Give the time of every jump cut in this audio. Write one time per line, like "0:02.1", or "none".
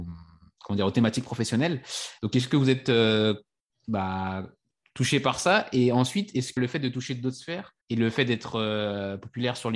0:02.2
0:06.6
0:07.8